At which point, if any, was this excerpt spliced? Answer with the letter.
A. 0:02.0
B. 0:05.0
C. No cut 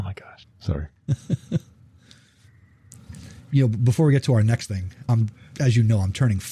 B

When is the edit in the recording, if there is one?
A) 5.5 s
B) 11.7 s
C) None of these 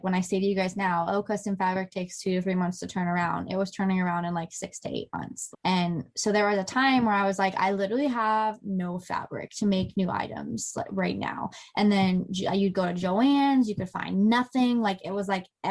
A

